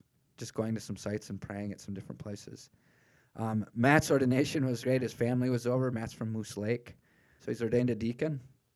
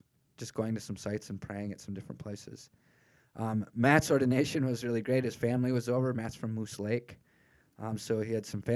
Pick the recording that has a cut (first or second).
first